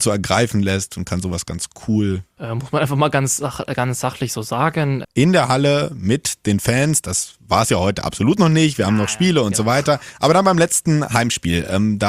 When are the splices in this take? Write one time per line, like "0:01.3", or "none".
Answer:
0:02.4
0:05.0